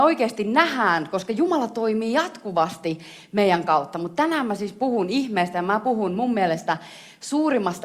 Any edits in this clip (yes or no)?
no